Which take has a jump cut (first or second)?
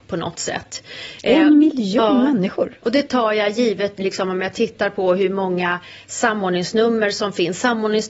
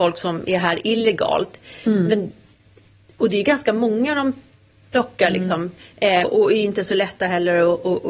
second